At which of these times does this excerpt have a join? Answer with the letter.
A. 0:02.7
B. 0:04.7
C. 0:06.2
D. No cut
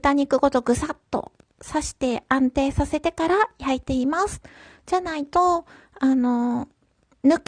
D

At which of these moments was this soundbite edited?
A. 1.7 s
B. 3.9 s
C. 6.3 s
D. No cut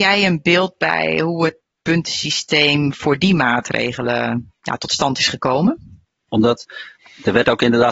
C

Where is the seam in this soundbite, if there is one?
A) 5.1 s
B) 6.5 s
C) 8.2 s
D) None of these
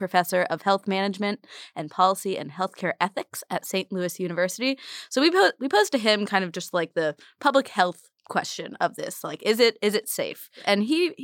C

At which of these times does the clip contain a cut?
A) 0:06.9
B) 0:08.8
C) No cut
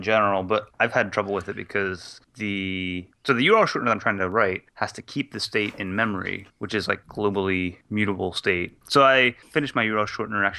B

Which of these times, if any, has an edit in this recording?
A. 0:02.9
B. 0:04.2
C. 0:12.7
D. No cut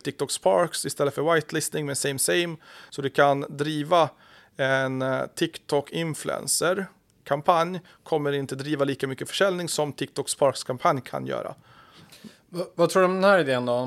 A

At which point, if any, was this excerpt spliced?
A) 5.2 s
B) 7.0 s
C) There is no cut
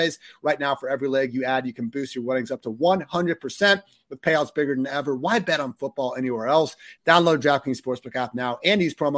B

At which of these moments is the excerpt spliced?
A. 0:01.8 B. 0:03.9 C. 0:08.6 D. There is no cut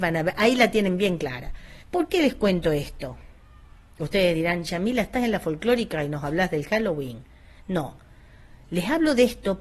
A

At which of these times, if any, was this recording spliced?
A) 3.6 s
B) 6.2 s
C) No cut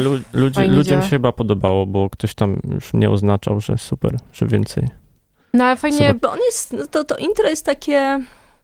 B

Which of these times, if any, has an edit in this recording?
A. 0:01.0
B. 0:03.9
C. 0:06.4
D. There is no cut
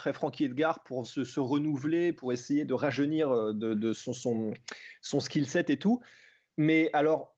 A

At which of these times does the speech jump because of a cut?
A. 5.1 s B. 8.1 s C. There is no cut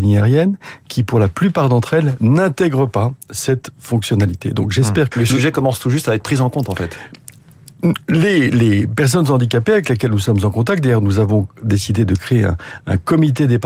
A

